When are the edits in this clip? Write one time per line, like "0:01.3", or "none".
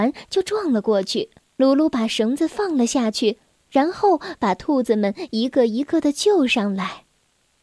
0:01.4